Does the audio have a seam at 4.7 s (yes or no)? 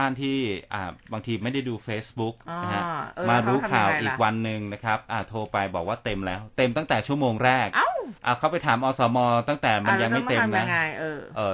no